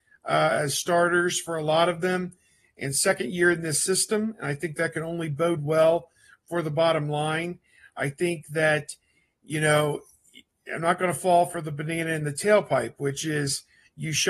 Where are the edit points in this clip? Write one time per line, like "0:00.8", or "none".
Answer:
none